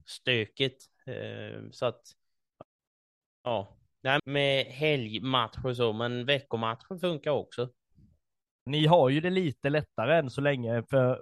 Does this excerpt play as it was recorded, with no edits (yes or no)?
no